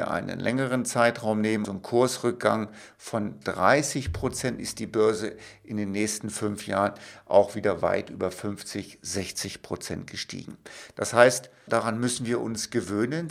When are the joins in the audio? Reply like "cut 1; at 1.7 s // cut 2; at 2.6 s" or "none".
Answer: cut 1; at 1.6 s // cut 2; at 11.7 s